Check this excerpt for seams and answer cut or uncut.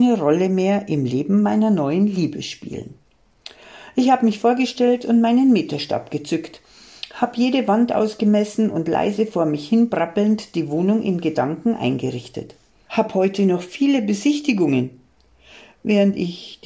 cut